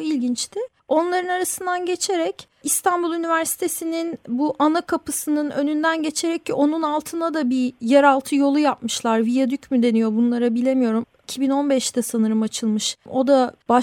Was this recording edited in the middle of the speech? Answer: no; 0 cuts

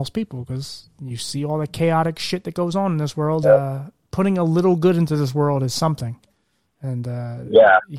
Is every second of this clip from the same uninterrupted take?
no; 1 cut; at 3.4 s

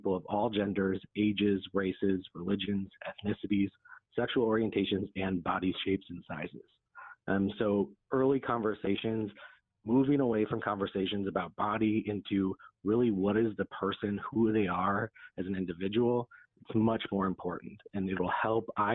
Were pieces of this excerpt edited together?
no; 0 cuts

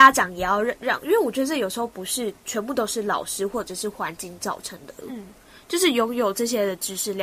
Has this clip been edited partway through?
yes; 1 cut; at 5.0 s

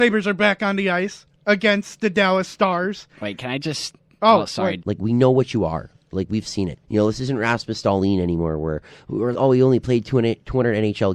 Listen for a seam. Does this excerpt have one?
yes; 3 cuts; at 4.8 s, 6.8 s, 9.3 s

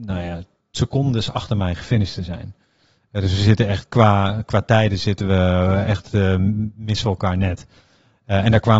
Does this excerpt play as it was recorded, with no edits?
yes; 0 cuts

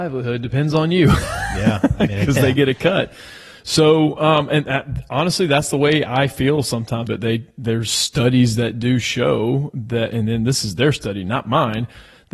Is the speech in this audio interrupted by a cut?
yes; 1 cut; at 7.1 s

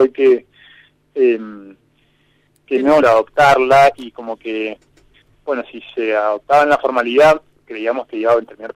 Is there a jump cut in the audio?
yes; 1 cut; at 3.0 s

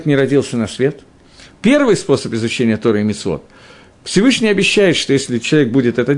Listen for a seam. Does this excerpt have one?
no; 0 cuts

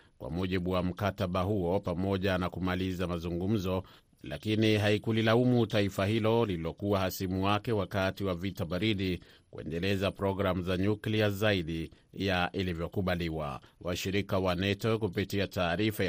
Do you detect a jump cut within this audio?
no; 0 cuts

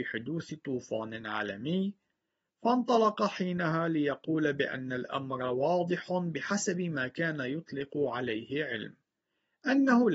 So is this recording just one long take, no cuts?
yes; 0 cuts

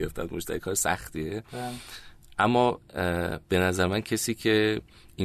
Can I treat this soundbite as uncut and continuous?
no; 1 cut; at 3.4 s

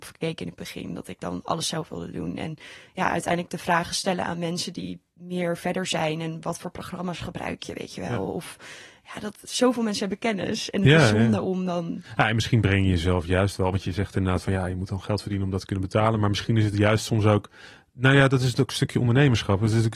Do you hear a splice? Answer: no; 0 cuts

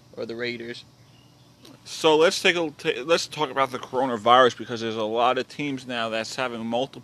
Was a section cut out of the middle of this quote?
yes; 2 cuts; at 1.7 s, 3.3 s

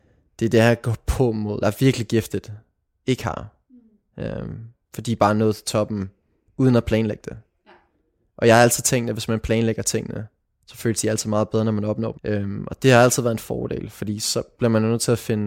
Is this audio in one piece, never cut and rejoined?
no; 2 cuts; at 1.6 s, 12.1 s

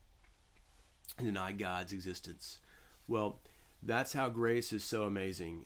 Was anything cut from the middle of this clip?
no; 0 cuts

